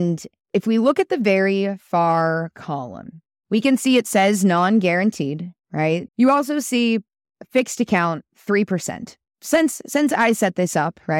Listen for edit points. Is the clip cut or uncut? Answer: cut